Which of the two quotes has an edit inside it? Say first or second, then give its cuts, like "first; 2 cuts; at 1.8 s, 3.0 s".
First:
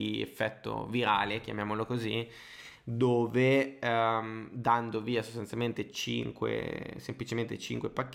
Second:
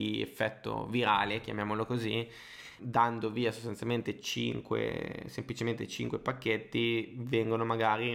second; 1 cut; at 2.8 s